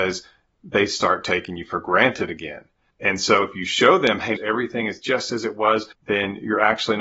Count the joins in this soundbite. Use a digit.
2